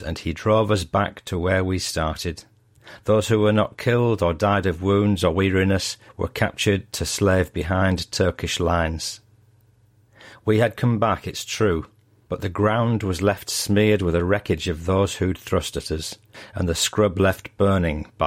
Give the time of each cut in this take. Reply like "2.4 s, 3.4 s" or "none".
none